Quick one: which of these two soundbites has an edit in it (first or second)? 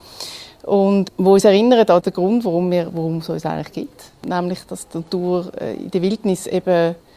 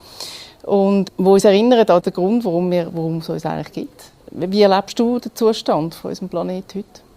second